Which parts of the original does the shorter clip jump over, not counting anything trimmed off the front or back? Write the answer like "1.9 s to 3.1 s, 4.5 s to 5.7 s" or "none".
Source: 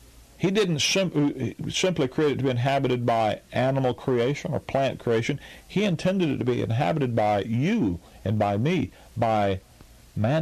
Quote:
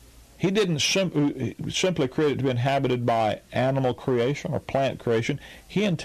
none